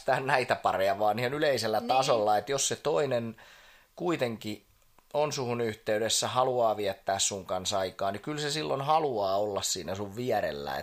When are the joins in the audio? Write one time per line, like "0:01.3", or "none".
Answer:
none